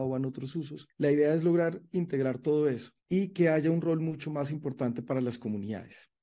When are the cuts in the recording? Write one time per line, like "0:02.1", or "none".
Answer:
none

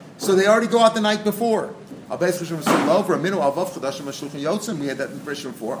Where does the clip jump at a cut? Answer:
0:02.1

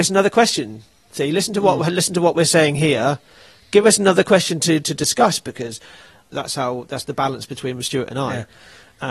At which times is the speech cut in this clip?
0:06.3

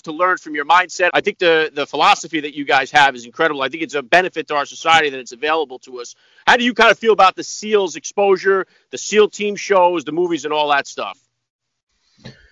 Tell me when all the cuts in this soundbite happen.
0:01.1

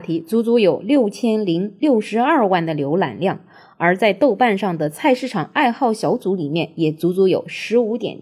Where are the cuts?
none

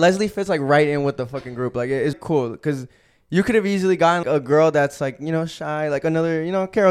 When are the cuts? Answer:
0:02.1
0:04.2

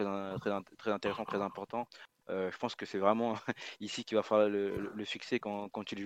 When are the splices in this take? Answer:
0:02.2

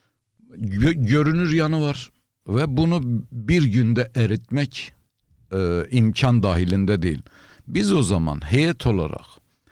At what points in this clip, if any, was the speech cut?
0:02.4

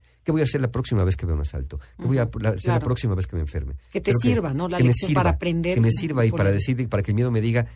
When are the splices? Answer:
none

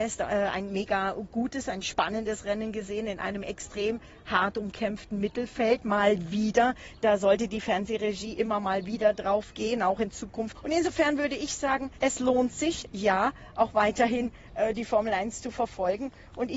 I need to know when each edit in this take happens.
0:10.5
0:12.0

